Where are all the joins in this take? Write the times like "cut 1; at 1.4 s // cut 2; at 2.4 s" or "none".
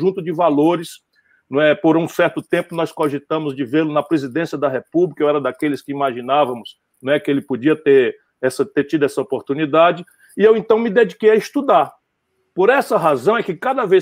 none